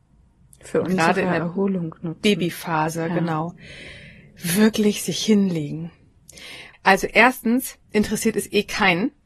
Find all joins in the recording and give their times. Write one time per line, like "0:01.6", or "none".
0:06.7
0:07.8